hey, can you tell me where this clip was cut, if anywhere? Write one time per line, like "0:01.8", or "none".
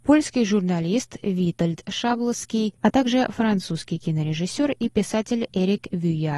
0:02.8